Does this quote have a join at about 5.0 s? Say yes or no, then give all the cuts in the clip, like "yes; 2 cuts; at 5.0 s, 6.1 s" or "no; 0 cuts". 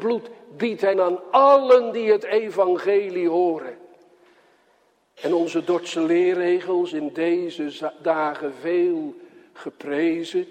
no; 1 cut; at 0.9 s